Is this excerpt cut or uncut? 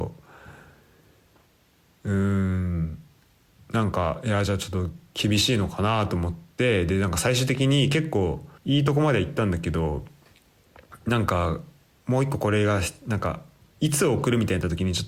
cut